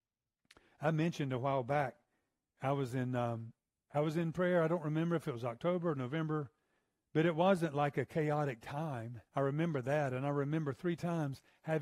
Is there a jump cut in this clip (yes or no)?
yes